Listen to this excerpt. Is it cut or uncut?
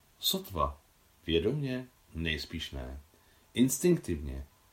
uncut